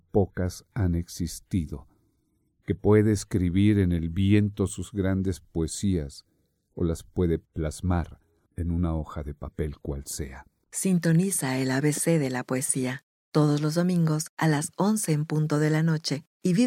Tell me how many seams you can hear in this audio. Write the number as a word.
one